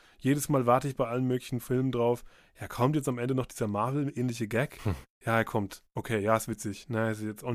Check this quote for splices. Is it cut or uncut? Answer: uncut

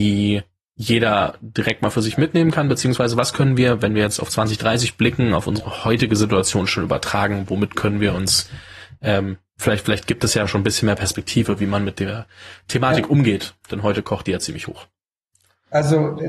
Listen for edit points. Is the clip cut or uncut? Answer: uncut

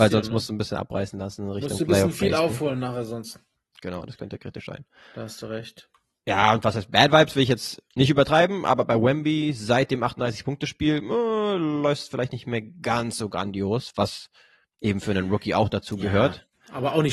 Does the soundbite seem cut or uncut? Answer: uncut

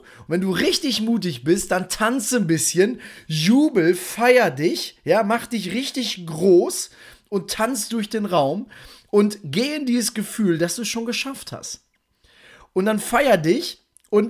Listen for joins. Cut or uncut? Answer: uncut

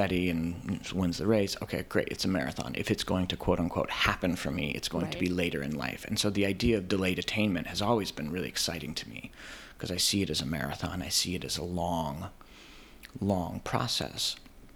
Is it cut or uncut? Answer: uncut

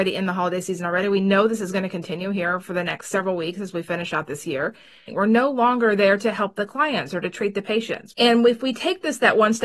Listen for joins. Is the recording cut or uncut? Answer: cut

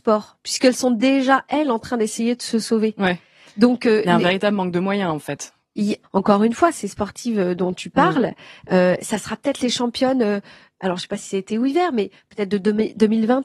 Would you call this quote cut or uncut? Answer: cut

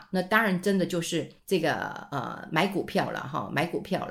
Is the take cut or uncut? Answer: cut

